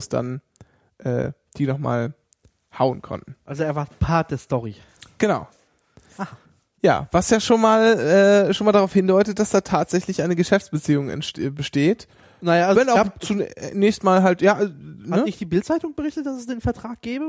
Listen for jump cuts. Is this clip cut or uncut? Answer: uncut